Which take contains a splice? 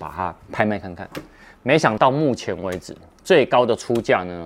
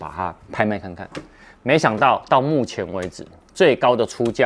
first; 1 cut; at 2.0 s

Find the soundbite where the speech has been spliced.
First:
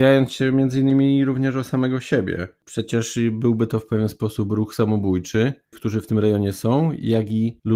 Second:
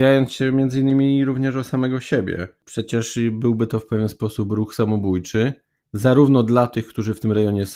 first; 1 cut; at 5.7 s

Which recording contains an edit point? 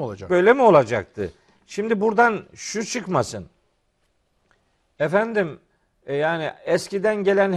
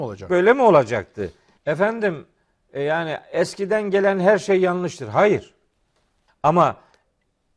second; 2 cuts; at 1.6 s, 6.3 s

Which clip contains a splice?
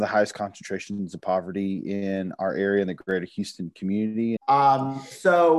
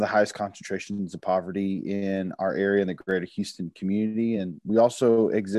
first; 1 cut; at 4.4 s

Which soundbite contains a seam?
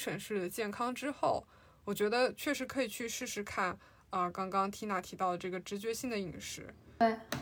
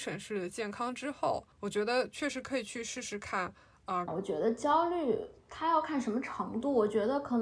second; 3 cuts; at 1.5 s, 4.1 s, 5.4 s

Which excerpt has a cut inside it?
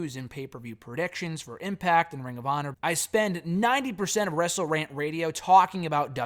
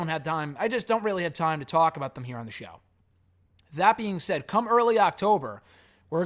first; 1 cut; at 2.7 s

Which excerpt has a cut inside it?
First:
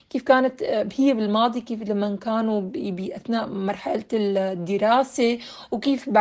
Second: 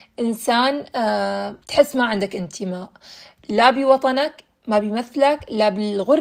second; 1 cut; at 1.6 s

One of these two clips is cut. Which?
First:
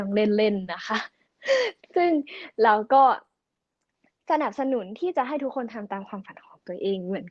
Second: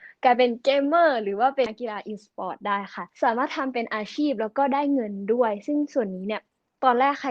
second; 2 cuts; at 1.7 s, 3.1 s

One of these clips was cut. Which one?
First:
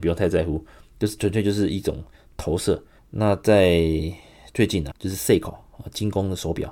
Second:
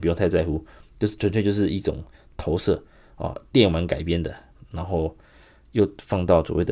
first; 2 cuts; at 3.0 s, 4.9 s

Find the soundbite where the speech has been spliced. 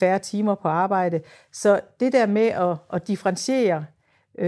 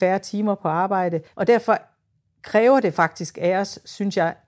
second; 1 cut; at 1.3 s

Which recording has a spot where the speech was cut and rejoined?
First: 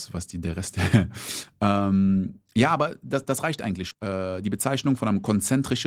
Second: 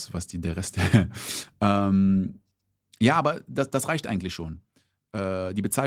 first; 2 cuts; at 2.5 s, 3.9 s

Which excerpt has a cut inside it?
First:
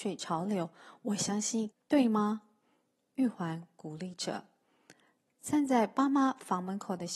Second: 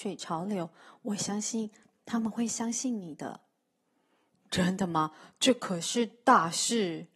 first; 1 cut; at 1.7 s

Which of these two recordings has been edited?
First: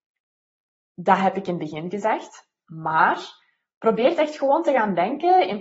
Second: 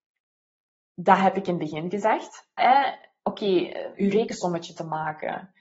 second; 2 cuts; at 2.6 s, 3.9 s

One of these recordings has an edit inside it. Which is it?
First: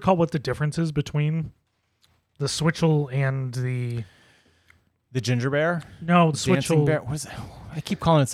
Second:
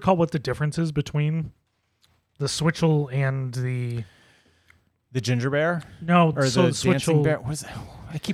first; 1 cut; at 6.3 s

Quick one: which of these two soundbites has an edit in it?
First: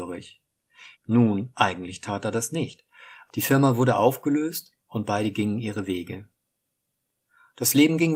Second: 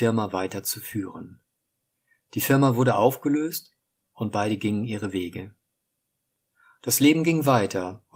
first; 3 cuts; at 0.9 s, 3.3 s, 4.8 s

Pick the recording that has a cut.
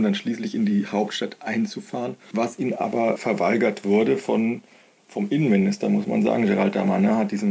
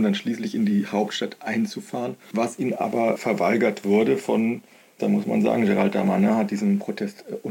second; 1 cut; at 5.0 s

